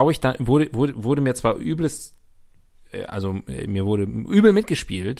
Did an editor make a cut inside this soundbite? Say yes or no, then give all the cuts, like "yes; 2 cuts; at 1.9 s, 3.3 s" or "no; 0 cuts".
no; 0 cuts